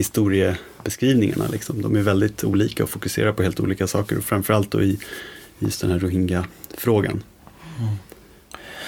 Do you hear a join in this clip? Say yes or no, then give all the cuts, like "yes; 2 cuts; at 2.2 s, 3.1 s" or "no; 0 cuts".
no; 0 cuts